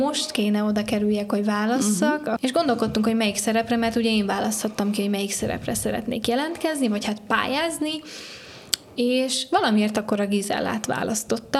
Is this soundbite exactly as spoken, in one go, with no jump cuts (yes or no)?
no